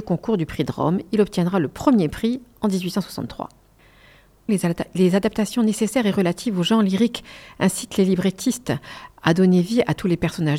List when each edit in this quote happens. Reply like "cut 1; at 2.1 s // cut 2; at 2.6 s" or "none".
cut 1; at 4.5 s